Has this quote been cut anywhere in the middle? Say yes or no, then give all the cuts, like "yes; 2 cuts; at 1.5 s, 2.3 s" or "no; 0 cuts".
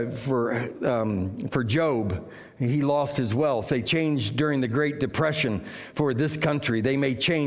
no; 0 cuts